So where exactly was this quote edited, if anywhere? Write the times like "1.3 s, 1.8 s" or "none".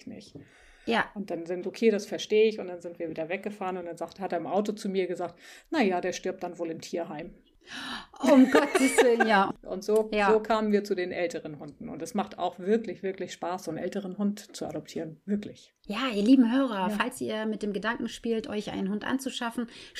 1.6 s